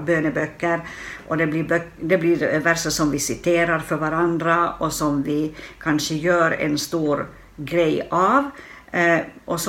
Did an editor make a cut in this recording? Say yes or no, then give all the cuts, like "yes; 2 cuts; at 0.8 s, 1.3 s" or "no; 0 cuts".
no; 0 cuts